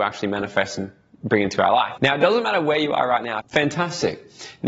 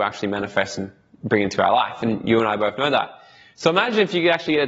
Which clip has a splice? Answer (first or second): first